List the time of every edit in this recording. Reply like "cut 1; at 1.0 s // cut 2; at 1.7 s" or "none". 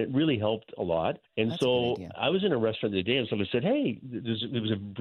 cut 1; at 1.2 s